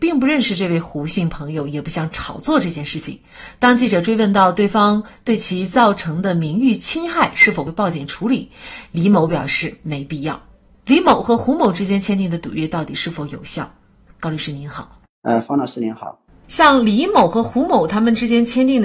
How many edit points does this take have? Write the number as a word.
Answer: two